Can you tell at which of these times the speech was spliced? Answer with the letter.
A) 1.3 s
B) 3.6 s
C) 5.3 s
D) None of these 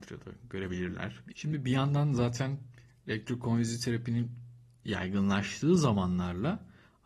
A